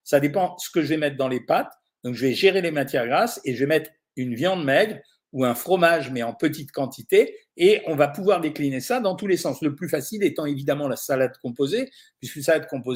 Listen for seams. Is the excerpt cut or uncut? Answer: cut